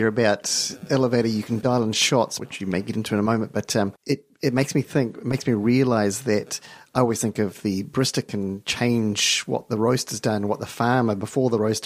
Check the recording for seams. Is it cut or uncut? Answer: cut